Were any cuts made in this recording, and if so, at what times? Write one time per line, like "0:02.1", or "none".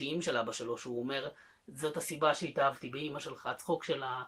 none